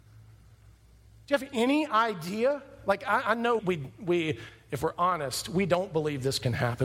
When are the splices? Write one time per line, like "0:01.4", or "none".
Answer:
0:03.6

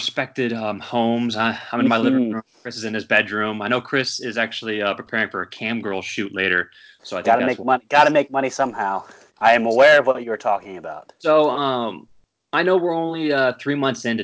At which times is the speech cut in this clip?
0:09.3

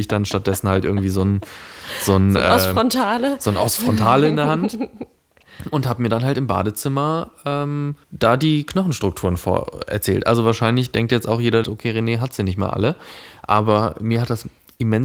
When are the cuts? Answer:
0:08.0
0:11.6

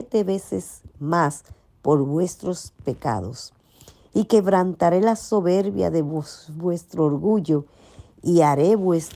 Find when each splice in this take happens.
none

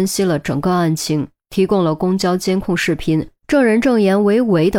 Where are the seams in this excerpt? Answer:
0:03.4

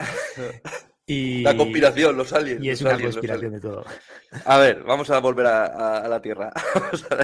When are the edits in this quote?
none

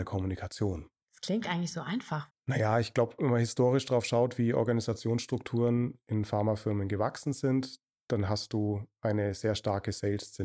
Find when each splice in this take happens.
0:02.3

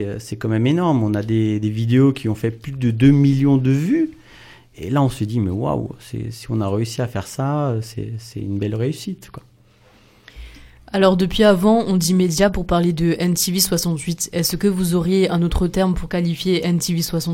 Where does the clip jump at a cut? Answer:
none

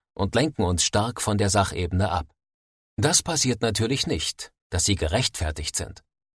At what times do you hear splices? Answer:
0:02.8
0:04.6

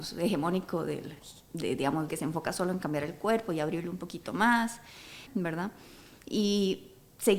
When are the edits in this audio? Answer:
0:02.1
0:05.3

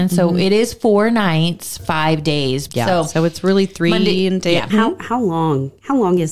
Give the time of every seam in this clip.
0:02.7
0:04.7

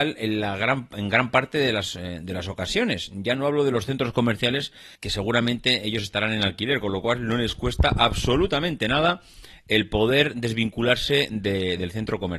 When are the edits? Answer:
0:04.9

